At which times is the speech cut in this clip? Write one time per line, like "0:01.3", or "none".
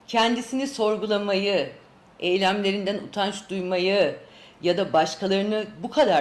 none